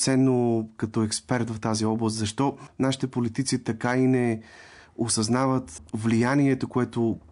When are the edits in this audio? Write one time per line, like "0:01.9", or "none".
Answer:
none